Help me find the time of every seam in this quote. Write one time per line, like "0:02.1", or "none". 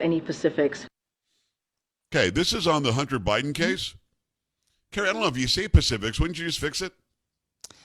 none